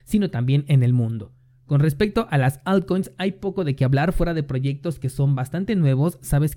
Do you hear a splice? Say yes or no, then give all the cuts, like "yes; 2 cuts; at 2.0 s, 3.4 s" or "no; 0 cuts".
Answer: no; 0 cuts